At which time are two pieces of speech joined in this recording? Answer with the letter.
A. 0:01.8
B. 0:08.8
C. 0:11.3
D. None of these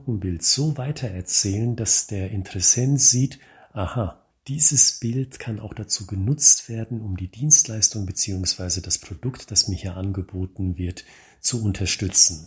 D